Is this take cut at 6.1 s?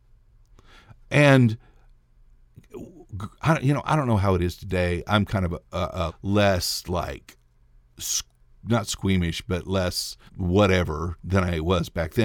yes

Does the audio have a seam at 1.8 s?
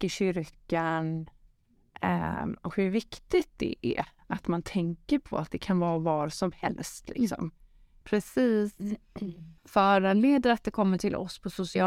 no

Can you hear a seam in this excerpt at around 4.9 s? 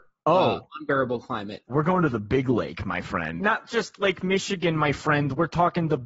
no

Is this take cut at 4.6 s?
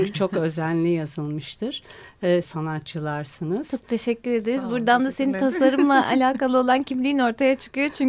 no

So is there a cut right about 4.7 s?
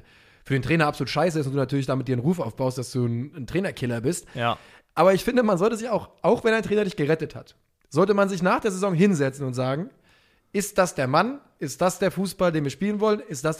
no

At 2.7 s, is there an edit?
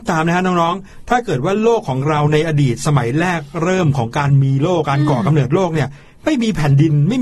no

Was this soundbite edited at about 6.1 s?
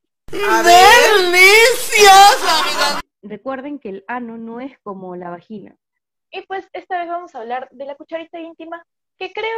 yes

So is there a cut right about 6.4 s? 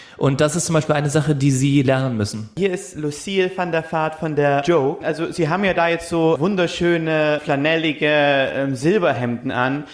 yes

